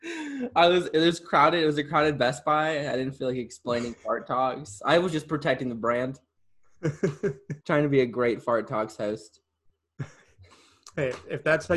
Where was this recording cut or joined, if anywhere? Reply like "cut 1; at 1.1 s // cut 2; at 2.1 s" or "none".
cut 1; at 4.8 s // cut 2; at 7.6 s

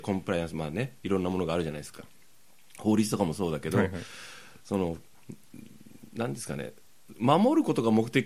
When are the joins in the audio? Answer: none

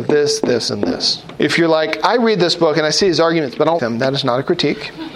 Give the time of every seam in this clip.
cut 1; at 1.4 s // cut 2; at 3.8 s

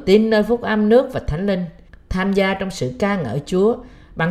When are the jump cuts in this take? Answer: cut 1; at 1.9 s

